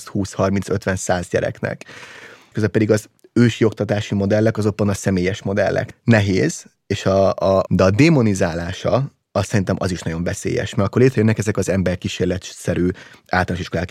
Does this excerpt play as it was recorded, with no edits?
no; 3 cuts; at 2.5 s, 5.9 s, 7.7 s

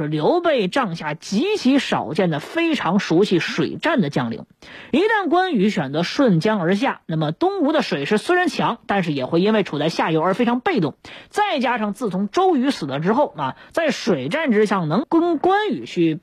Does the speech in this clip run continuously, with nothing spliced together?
no; 1 cut; at 15.0 s

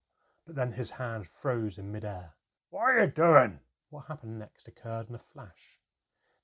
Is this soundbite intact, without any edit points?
no; 2 cuts; at 2.6 s, 3.8 s

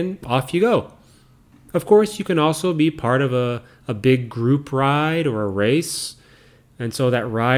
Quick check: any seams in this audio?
no; 0 cuts

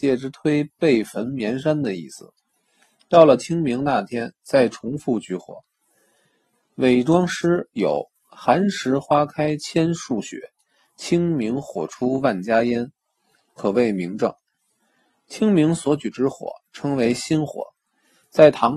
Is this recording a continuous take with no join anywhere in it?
yes; 0 cuts

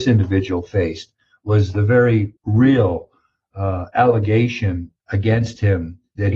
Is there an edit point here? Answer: yes; 2 cuts; at 2.4 s, 5.0 s

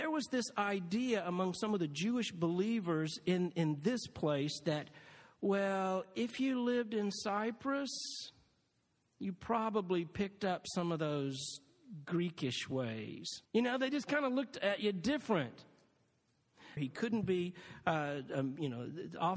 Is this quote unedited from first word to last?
no; 2 cuts; at 13.5 s, 16.8 s

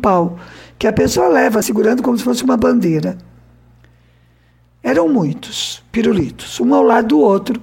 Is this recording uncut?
no; 1 cut; at 1.6 s

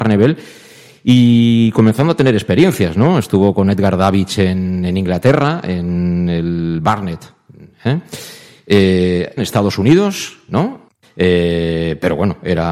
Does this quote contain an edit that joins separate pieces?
yes; 2 cuts; at 9.4 s, 11.0 s

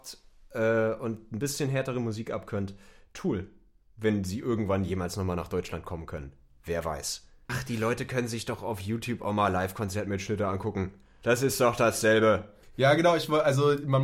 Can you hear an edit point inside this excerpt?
yes; 1 cut; at 7.5 s

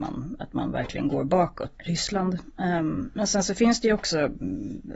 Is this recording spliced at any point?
yes; 1 cut; at 1.7 s

